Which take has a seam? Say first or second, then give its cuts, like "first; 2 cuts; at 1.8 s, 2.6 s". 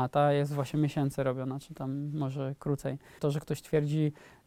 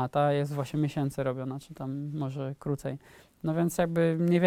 first; 1 cut; at 3.2 s